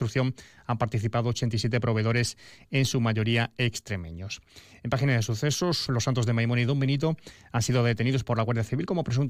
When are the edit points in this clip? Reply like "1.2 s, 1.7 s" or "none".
5.9 s